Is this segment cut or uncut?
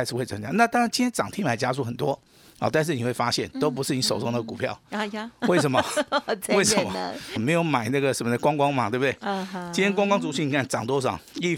cut